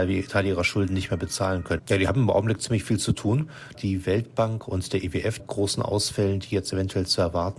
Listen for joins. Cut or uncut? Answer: cut